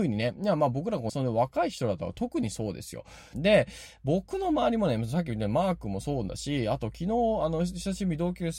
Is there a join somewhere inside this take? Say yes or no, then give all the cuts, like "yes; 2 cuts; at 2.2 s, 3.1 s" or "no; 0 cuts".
yes; 2 cuts; at 1.1 s, 3.3 s